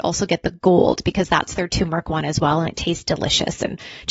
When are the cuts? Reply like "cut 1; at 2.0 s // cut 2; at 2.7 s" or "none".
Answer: none